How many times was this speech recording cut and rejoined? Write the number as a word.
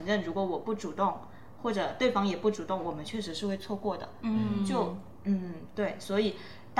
zero